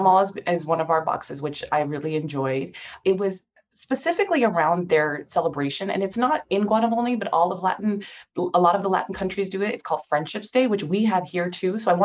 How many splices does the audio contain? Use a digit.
0